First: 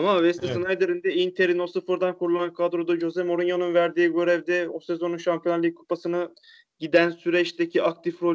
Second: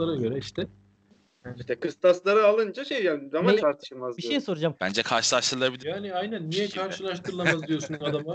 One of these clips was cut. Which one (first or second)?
second